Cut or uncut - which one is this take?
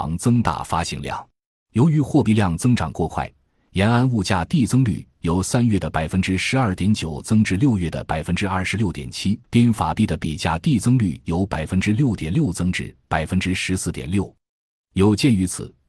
cut